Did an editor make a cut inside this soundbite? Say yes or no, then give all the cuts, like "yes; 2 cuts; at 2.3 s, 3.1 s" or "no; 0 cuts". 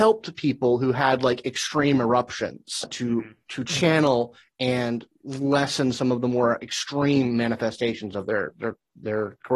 no; 0 cuts